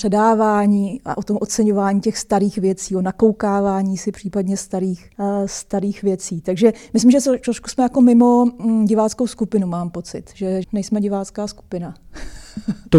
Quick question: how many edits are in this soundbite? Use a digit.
1